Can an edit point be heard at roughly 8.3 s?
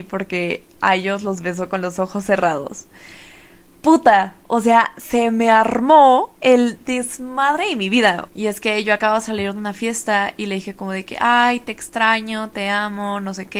yes; 1 cut; at 8.3 s

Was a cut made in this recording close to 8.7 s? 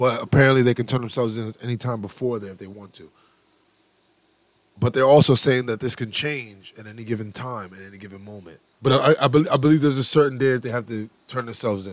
yes; 1 cut; at 8.7 s

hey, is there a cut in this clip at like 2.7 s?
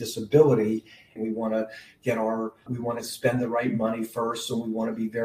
yes; 2 cuts; at 1.2 s, 2.7 s

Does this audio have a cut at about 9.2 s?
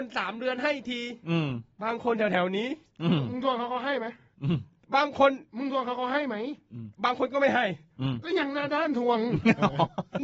no; 2 cuts; at 1.7 s, 6.9 s

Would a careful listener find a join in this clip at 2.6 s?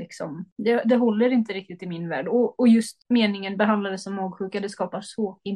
no; 0 cuts

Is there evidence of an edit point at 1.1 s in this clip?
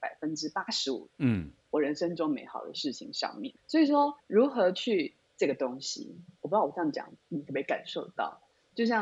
no; 1 cut; at 5.2 s

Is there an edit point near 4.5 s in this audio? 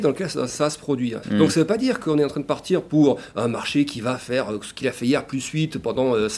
no; 1 cut; at 1.2 s

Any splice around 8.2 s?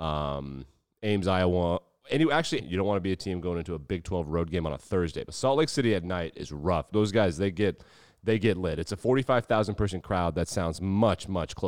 no; 2 cuts; at 2.6 s, 6.9 s

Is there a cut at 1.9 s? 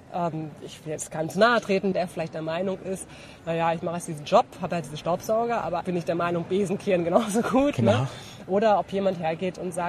yes; 2 cuts; at 1.9 s, 5.8 s

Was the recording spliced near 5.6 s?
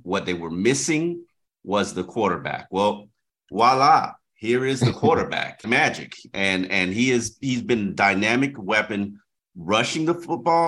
yes; 1 cut; at 5.6 s

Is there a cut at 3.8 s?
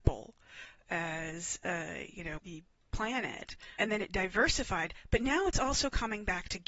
yes; 2 cuts; at 2.4 s, 3.8 s

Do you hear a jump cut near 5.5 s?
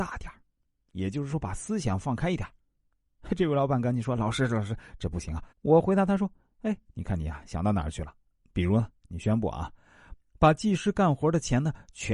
yes; 2 cuts; at 5.5 s, 8.4 s

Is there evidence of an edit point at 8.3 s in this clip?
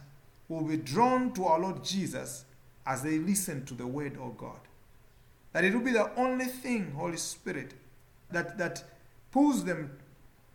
yes; 1 cut; at 8.3 s

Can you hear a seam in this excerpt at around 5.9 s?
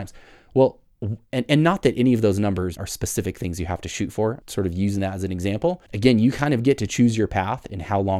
yes; 3 cuts; at 2.8 s, 4.4 s, 5.9 s

